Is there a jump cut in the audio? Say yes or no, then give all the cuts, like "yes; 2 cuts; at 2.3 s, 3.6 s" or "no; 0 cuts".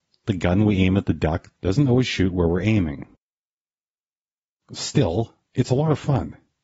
no; 0 cuts